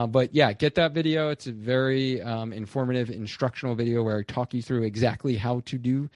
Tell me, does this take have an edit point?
no; 0 cuts

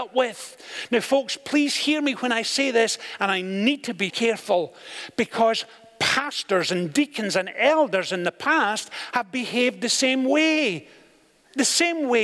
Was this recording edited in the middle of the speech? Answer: yes; 1 cut; at 4.1 s

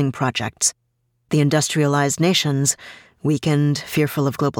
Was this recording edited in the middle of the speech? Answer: no; 0 cuts

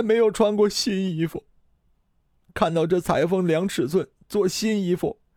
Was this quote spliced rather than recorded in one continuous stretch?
no; 0 cuts

